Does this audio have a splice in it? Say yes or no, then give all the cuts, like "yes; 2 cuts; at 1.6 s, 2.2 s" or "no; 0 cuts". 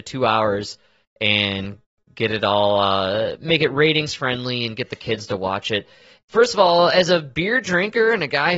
yes; 1 cut; at 6.2 s